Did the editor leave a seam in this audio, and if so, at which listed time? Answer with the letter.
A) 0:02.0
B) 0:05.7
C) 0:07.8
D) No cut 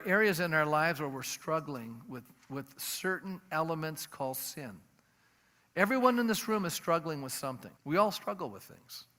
C